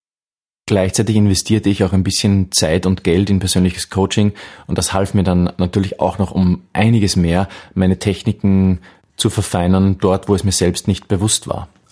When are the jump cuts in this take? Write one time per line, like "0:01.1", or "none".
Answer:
none